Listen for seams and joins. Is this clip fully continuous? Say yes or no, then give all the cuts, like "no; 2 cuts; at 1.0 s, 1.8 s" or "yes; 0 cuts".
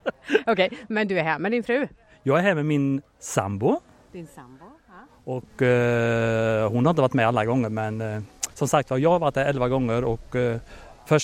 yes; 0 cuts